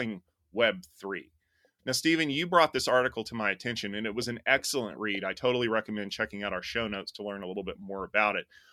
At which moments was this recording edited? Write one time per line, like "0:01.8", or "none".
0:01.8